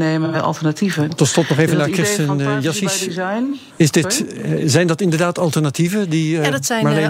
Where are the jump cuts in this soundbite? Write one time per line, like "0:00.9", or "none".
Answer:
0:01.1